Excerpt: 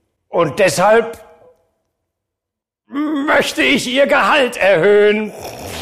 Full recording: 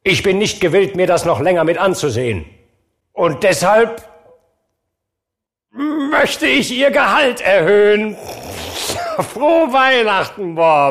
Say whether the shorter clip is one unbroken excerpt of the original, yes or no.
yes